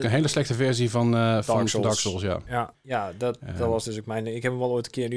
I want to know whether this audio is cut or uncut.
cut